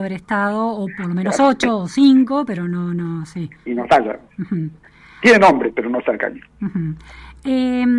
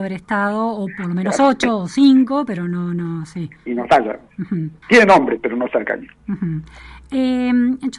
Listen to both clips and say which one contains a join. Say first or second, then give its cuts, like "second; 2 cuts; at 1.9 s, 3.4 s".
second; 1 cut; at 4.8 s